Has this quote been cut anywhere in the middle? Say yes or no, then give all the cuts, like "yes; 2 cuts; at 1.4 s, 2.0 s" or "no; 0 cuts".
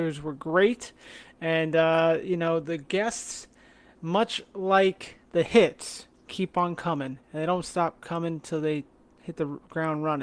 yes; 1 cut; at 3.9 s